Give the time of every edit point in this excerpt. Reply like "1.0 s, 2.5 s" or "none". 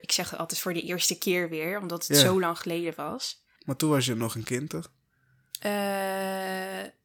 3.6 s